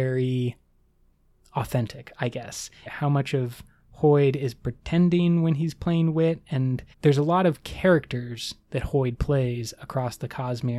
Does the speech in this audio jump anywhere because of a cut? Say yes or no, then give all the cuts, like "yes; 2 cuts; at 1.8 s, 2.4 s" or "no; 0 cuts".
yes; 2 cuts; at 2.9 s, 6.9 s